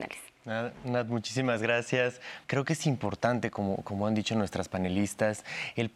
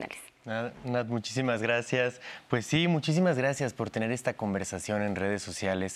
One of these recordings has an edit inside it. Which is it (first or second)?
first